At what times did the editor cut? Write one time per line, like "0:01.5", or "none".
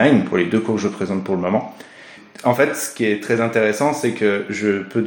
none